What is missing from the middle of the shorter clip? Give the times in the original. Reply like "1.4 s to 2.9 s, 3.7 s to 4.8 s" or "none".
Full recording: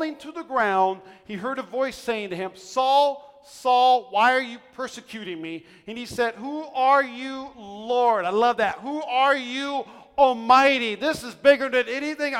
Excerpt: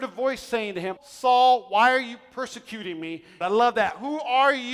2.5 s to 3.4 s, 5.8 s to 8.2 s